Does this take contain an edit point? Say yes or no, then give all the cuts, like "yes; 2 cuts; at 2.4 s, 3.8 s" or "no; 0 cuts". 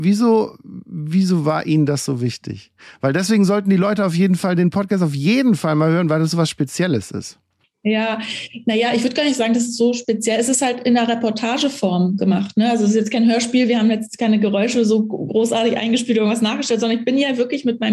no; 0 cuts